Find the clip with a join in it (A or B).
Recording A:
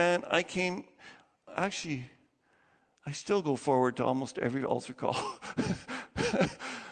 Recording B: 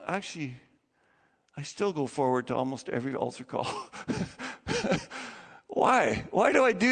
A